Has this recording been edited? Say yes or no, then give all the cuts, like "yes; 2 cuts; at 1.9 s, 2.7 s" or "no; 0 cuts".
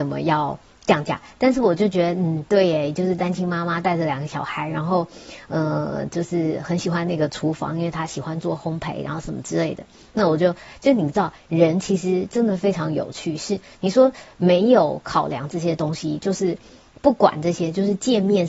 no; 0 cuts